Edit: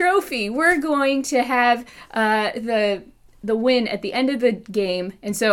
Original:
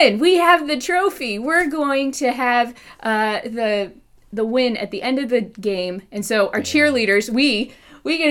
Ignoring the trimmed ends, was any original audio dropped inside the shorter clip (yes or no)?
no